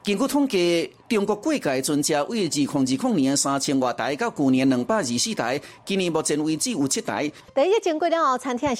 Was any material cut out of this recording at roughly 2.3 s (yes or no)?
no